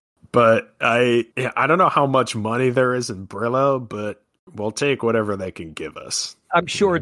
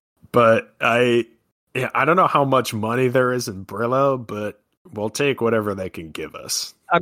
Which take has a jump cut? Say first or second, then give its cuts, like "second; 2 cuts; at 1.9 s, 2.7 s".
first; 1 cut; at 1.3 s